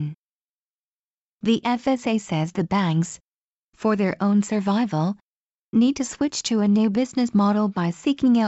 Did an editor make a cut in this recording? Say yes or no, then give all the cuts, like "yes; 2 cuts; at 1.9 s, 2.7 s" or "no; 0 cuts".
no; 0 cuts